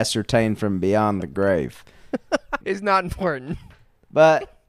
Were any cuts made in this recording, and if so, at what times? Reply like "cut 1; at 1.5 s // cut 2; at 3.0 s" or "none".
cut 1; at 2.6 s